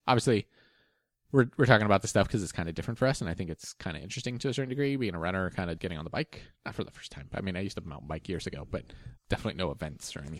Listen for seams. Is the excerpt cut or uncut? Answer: cut